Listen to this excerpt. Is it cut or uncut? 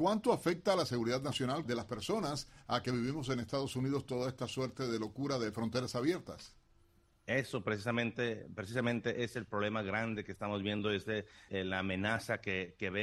cut